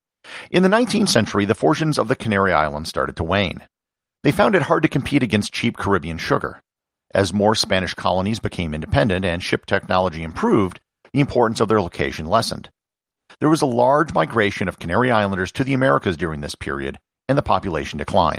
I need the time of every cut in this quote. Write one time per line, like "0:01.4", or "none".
none

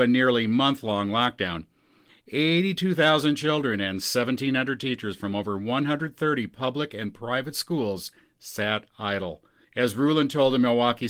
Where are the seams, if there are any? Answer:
0:02.1
0:09.6

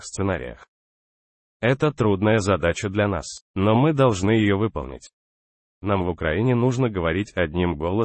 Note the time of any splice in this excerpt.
0:03.4
0:05.8

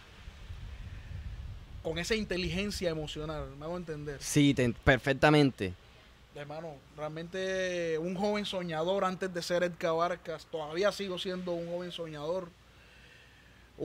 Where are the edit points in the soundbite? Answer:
none

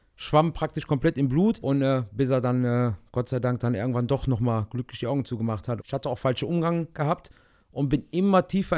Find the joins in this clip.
0:01.6
0:05.8

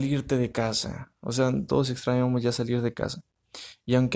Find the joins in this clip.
0:01.7

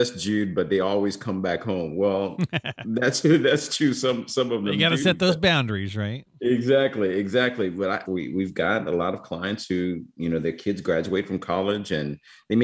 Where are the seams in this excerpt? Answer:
0:08.0

